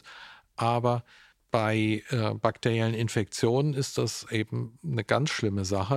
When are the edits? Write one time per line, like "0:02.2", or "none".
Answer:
none